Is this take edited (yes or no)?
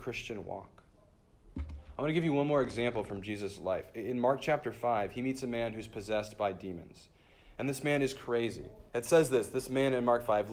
yes